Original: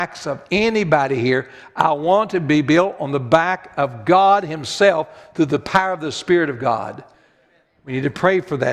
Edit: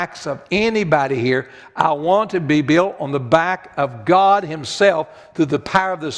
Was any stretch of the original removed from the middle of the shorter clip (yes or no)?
no